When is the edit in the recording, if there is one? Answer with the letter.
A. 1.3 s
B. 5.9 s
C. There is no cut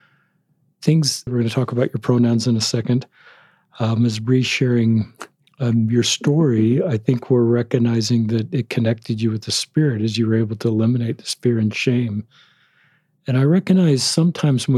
A